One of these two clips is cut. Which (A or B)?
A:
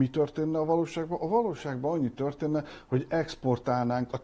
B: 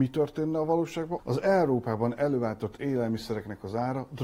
B